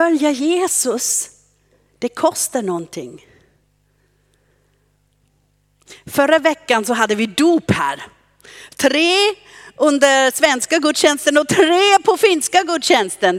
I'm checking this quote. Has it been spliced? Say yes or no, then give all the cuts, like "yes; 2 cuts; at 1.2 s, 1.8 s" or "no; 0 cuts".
no; 0 cuts